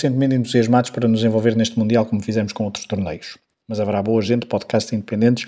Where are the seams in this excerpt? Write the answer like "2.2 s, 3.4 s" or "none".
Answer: none